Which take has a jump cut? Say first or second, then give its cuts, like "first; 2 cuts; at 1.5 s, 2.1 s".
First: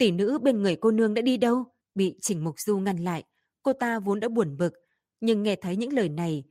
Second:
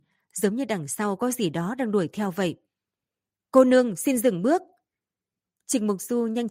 first; 1 cut; at 1.8 s